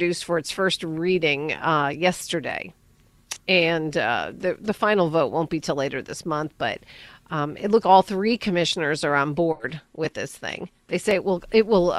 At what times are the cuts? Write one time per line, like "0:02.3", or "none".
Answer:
0:07.8